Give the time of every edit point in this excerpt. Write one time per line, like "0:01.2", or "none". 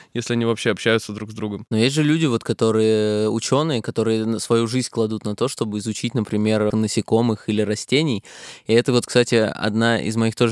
0:06.7